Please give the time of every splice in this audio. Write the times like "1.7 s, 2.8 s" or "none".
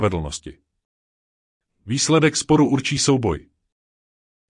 none